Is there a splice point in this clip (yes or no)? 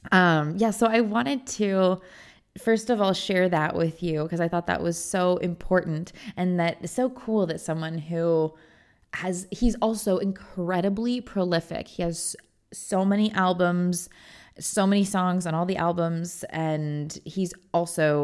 no